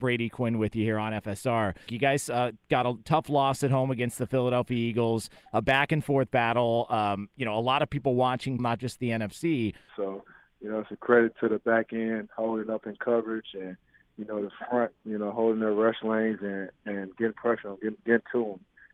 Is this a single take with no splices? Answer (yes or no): no